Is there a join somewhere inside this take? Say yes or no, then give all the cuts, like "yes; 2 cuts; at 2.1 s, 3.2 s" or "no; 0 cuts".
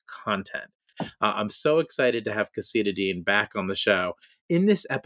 yes; 1 cut; at 0.9 s